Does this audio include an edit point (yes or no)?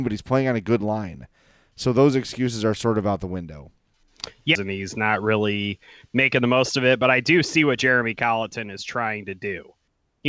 yes